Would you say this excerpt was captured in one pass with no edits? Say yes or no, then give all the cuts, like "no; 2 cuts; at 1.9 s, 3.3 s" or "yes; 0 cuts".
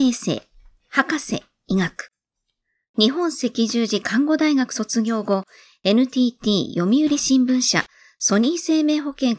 yes; 0 cuts